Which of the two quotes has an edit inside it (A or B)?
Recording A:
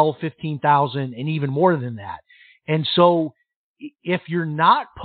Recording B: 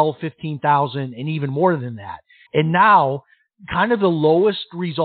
B